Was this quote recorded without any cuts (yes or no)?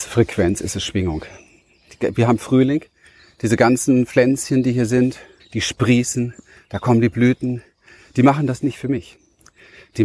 no